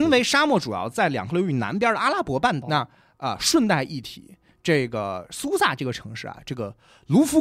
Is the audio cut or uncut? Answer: cut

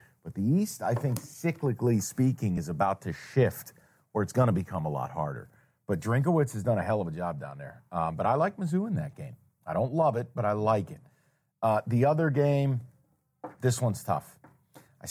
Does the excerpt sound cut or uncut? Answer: uncut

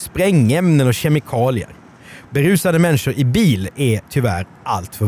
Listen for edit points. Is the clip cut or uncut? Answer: cut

